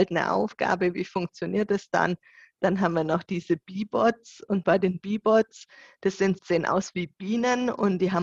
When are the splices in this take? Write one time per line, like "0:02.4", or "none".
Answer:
0:06.4